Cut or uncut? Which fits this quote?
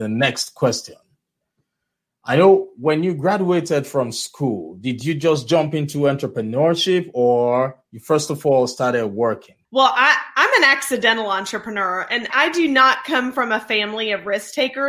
cut